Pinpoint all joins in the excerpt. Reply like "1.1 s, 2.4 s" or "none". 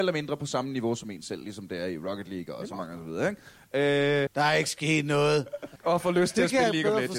4.3 s, 5.8 s